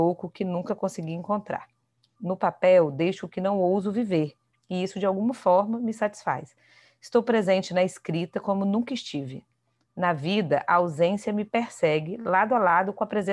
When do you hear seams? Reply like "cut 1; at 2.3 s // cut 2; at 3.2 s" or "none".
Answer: cut 1; at 2.2 s

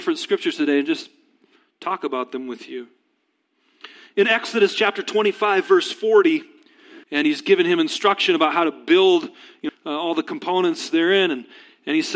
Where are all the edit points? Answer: cut 1; at 7.0 s // cut 2; at 9.7 s

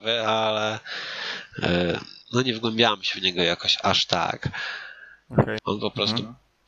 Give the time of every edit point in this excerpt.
cut 1; at 2.2 s // cut 2; at 5.6 s

